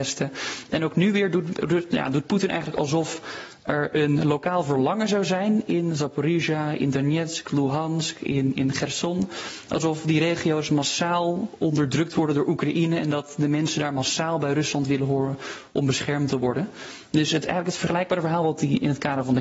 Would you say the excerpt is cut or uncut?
cut